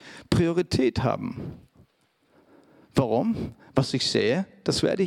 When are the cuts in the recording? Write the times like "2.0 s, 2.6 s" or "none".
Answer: none